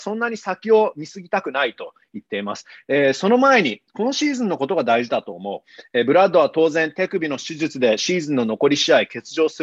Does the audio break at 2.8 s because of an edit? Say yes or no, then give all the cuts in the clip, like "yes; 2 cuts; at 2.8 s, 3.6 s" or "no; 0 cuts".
no; 0 cuts